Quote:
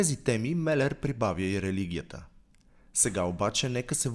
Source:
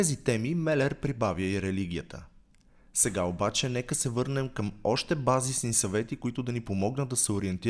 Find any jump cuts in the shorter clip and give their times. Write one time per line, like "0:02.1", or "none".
none

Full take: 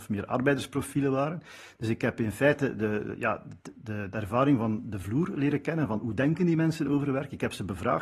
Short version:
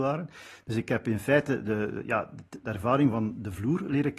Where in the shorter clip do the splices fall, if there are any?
0:02.6

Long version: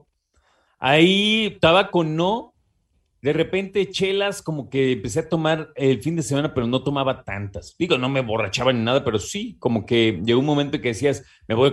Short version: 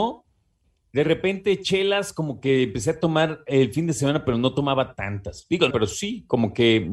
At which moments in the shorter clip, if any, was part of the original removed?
0:05.7

